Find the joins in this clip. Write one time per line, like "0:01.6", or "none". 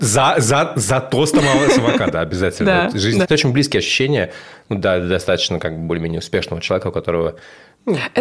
0:03.2